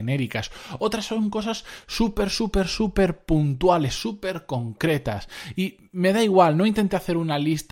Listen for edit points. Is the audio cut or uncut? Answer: uncut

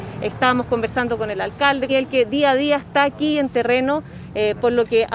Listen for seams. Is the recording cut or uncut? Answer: cut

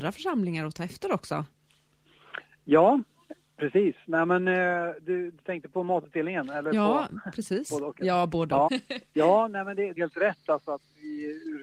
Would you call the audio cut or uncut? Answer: cut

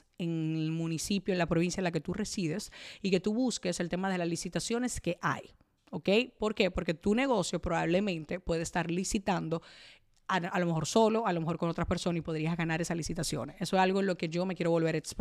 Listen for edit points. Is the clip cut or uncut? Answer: uncut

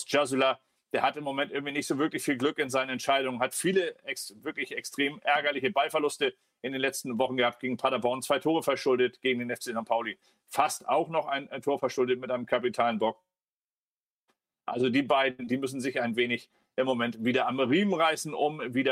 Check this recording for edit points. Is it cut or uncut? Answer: uncut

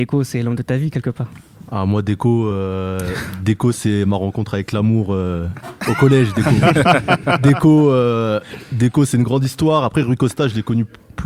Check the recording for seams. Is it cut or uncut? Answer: uncut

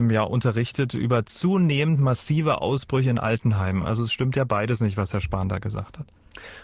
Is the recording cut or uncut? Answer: uncut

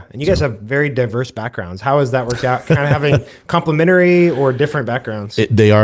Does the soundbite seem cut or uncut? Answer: uncut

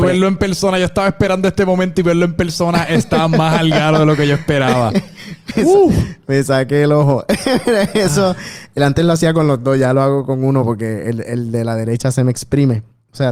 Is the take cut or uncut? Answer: uncut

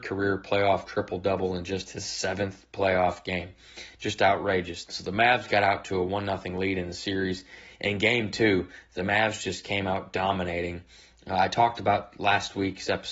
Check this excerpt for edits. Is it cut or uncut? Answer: cut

